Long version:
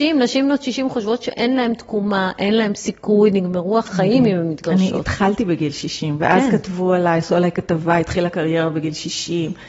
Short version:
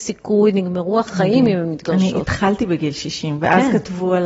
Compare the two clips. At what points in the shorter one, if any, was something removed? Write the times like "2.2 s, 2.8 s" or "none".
none